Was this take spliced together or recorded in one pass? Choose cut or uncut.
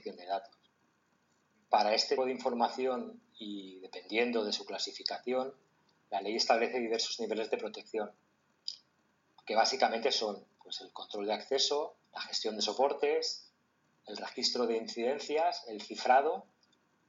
cut